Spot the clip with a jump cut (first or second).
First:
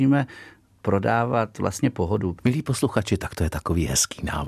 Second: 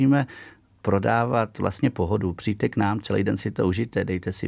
first